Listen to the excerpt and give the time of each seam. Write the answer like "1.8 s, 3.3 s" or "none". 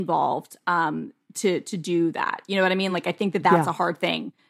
none

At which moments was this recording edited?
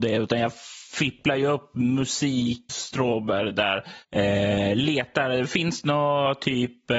2.7 s

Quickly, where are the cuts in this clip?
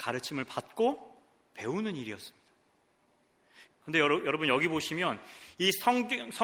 3.7 s

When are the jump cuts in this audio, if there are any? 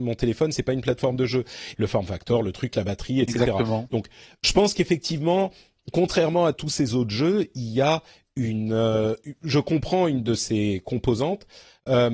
1.7 s

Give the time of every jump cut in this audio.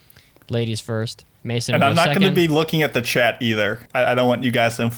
1.4 s

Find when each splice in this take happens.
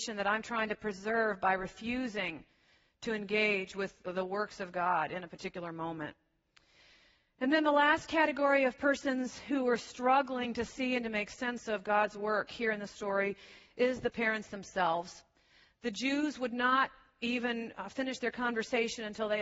none

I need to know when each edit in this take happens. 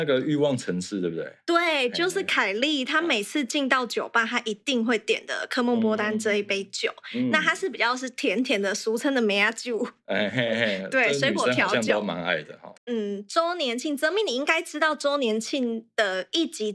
12.7 s

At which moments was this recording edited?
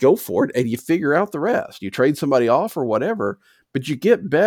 none

